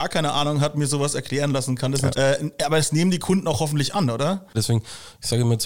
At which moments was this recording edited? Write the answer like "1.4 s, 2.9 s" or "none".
2.1 s, 4.5 s